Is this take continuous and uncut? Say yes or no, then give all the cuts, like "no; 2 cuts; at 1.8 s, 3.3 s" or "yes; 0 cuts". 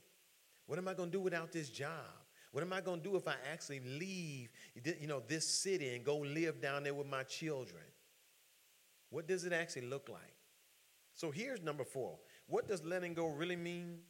no; 1 cut; at 2.5 s